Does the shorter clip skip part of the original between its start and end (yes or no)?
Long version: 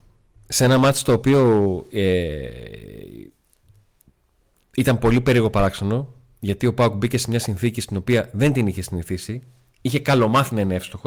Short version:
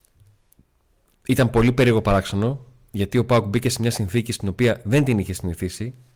no